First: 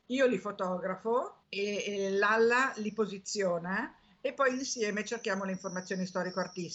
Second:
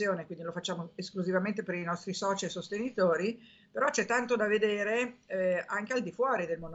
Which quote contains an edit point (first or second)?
first